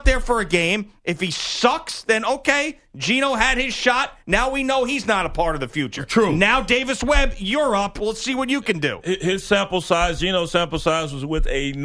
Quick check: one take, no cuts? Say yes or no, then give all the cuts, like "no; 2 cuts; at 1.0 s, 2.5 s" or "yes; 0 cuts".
yes; 0 cuts